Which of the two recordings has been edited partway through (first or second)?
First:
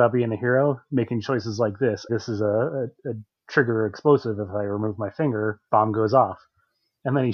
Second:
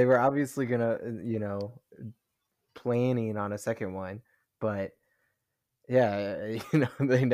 first